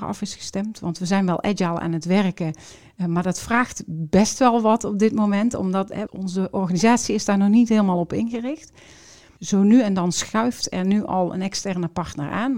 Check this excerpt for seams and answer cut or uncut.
cut